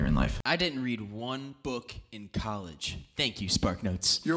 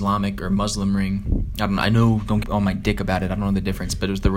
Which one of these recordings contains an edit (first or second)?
second